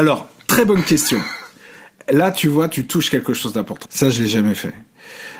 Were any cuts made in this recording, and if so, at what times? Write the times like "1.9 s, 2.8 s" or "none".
3.8 s